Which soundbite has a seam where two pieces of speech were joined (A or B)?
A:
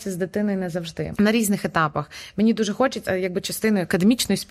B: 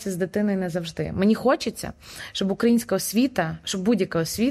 A